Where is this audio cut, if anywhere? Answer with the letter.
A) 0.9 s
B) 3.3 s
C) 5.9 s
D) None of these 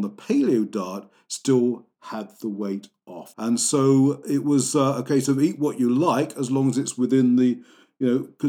B